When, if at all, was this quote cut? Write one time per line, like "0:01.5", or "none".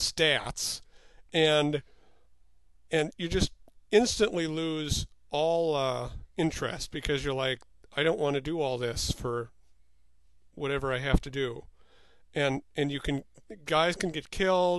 0:01.3